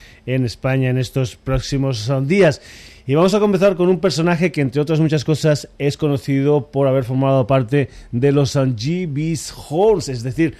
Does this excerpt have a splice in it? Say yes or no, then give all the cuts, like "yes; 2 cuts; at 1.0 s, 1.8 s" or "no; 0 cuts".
no; 0 cuts